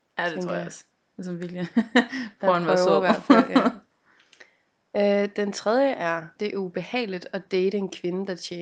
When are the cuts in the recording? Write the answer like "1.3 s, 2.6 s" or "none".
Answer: 6.4 s